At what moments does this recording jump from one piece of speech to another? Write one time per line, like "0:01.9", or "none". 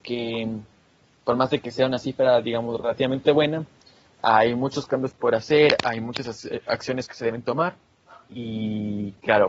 none